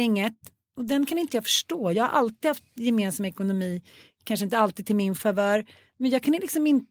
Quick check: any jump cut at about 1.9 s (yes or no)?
no